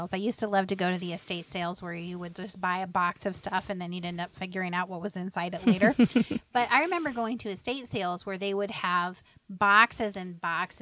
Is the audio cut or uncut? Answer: uncut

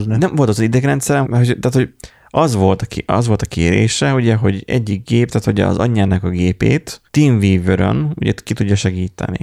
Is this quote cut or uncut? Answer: cut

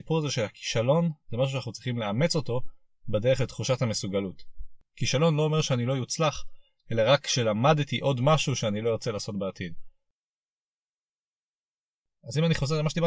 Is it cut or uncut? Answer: uncut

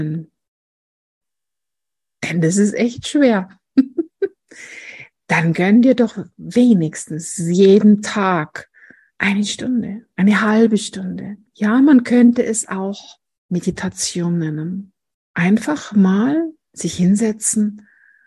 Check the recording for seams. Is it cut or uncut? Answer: cut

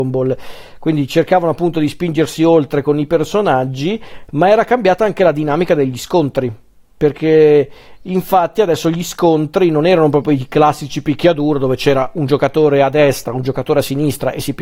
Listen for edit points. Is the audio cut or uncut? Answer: uncut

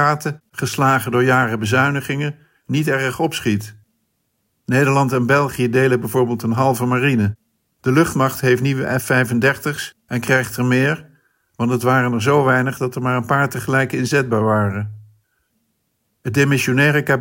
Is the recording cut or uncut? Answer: cut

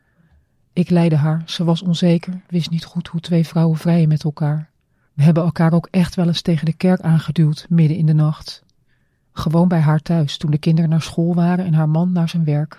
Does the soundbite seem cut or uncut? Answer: cut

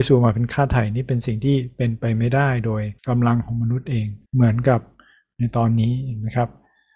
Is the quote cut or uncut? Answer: cut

